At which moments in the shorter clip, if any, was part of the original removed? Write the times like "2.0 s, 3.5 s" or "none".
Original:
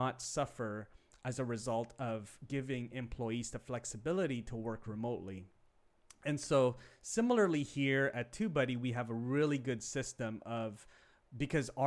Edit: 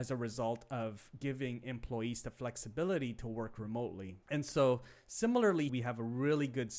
4.2 s, 5.7 s